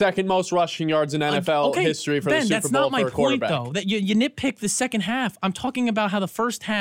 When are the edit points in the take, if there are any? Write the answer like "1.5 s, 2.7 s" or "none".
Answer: 3.8 s